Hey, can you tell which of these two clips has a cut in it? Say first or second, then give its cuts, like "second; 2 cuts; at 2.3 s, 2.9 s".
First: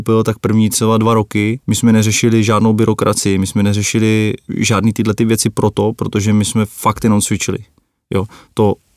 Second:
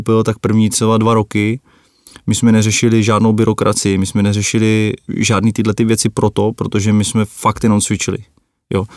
first; 1 cut; at 1.6 s